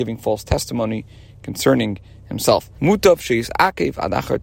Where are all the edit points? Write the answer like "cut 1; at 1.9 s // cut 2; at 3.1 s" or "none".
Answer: cut 1; at 2.8 s